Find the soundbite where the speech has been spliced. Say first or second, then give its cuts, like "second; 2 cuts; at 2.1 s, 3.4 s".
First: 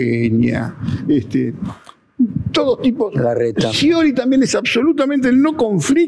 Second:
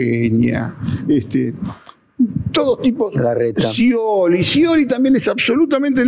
first; 1 cut; at 3.7 s